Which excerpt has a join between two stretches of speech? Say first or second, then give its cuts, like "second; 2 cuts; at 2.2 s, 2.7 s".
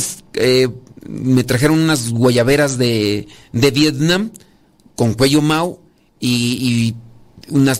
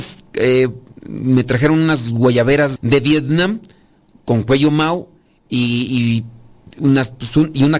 second; 1 cut; at 2.8 s